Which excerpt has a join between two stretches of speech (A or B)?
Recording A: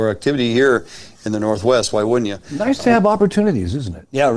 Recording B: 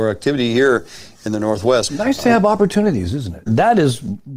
B